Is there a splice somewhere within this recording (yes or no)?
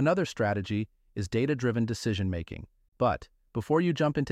yes